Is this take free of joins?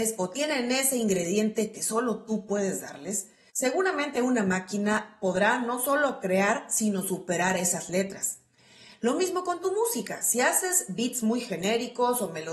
yes; 0 cuts

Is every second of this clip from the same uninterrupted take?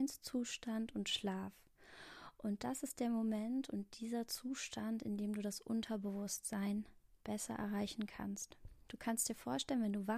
yes; 0 cuts

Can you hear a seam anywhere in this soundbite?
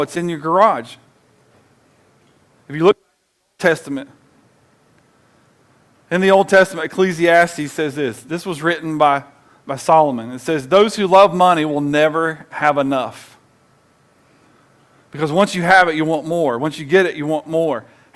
no; 0 cuts

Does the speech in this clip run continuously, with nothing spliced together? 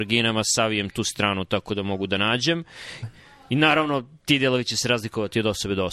no; 1 cut; at 3.0 s

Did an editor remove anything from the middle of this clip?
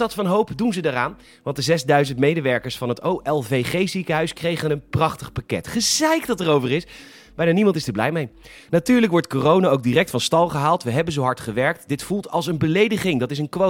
no; 0 cuts

